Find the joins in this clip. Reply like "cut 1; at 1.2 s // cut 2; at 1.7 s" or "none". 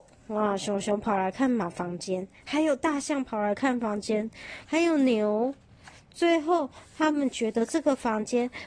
cut 1; at 4.6 s